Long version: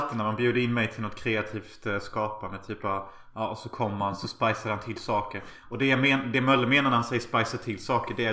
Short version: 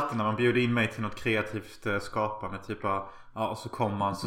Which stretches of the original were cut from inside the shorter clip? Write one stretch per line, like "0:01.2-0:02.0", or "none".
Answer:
none